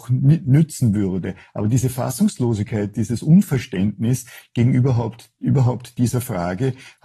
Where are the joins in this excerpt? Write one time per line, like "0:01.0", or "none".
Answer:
none